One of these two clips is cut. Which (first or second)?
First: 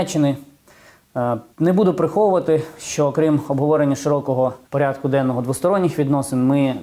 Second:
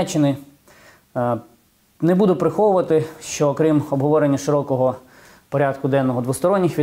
first